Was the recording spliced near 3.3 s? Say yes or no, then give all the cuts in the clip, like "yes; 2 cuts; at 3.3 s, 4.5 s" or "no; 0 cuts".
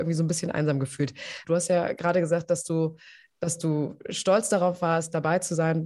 no; 1 cut; at 1.4 s